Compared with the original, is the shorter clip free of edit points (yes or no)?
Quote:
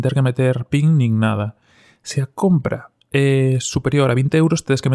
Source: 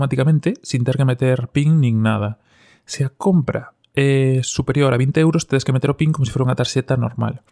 yes